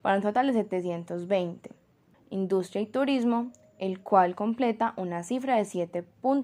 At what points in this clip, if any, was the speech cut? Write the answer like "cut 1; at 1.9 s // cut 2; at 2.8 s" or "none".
cut 1; at 2.1 s